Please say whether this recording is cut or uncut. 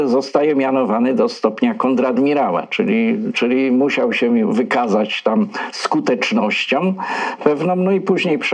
uncut